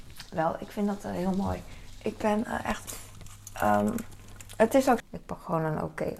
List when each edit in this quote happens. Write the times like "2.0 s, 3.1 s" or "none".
5.0 s